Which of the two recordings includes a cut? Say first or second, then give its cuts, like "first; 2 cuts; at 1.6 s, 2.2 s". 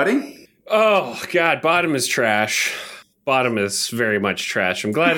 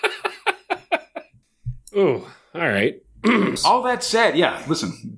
second; 1 cut; at 3.6 s